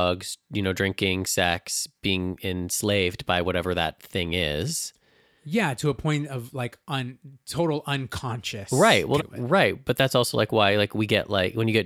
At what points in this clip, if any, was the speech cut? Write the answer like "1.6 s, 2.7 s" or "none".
9.2 s